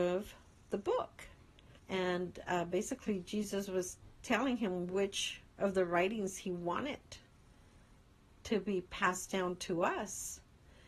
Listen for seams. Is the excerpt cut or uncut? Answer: cut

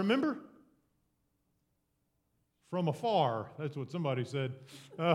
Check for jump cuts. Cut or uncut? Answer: uncut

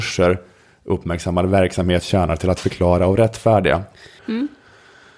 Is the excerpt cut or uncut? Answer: cut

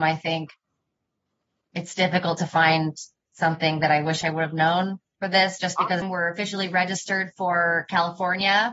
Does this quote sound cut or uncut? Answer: cut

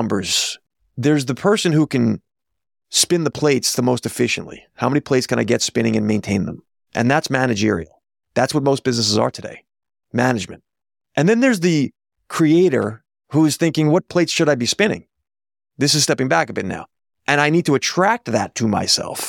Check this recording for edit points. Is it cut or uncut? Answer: uncut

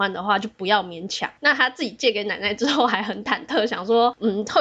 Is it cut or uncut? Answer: uncut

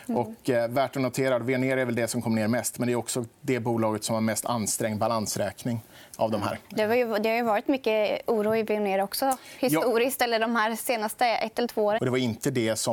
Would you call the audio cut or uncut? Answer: cut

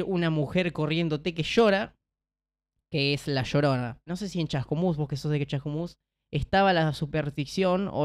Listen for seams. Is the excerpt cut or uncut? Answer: uncut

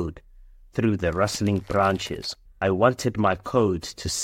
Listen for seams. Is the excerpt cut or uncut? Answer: cut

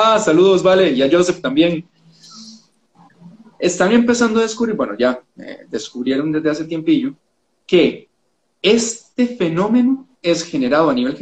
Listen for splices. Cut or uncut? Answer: uncut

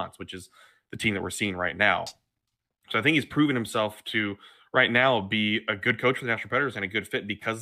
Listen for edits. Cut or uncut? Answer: uncut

